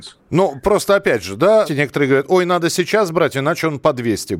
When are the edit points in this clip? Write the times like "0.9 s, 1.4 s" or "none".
1.7 s